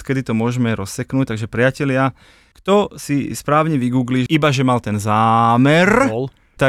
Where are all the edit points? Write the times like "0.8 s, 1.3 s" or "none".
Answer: 4.3 s